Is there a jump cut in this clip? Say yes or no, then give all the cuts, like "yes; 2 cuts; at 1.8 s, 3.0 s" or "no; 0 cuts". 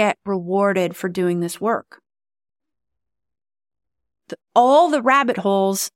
no; 0 cuts